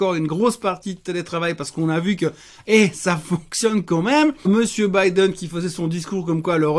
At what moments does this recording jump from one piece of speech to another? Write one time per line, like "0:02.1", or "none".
0:04.4

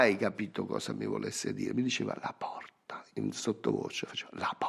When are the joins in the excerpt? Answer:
none

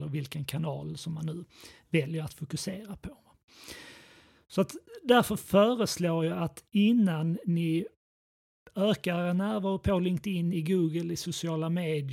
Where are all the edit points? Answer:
none

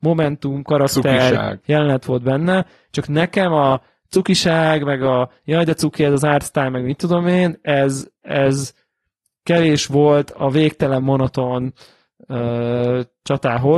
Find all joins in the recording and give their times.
none

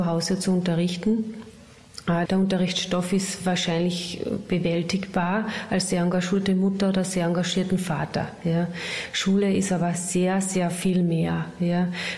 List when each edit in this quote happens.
0:02.3

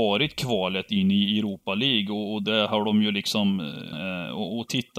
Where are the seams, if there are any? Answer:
0:03.9

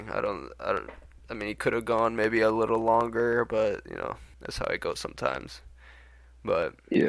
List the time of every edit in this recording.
0:04.3

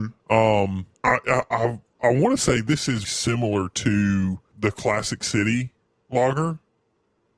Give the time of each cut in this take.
0:00.9
0:03.0
0:04.5

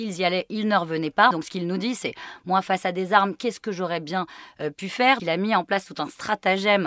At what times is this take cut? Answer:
0:01.3
0:05.2

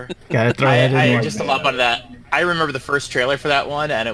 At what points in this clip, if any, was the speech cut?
0:02.2

